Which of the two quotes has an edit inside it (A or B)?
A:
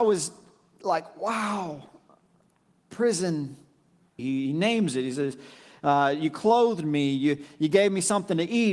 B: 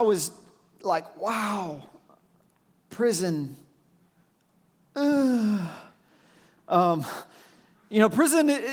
A